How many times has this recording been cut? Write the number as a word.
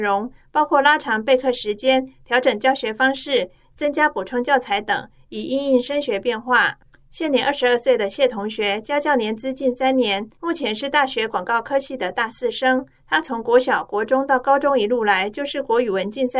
zero